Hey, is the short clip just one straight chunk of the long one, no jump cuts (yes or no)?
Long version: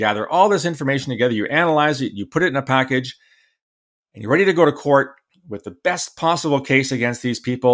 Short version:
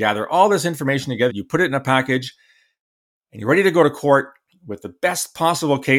no